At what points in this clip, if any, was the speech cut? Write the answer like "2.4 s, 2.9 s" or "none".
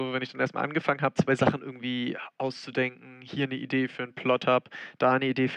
1.1 s